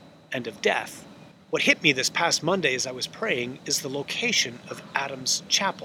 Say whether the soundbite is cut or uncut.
cut